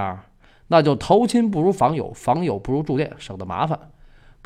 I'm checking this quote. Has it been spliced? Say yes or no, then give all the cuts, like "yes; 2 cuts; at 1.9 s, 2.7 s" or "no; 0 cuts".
no; 0 cuts